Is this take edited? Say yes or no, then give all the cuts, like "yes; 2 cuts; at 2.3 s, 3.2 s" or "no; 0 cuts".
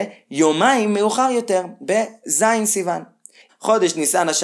yes; 1 cut; at 3.5 s